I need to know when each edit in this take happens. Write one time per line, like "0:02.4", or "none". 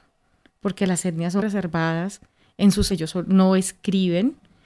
0:01.4
0:02.9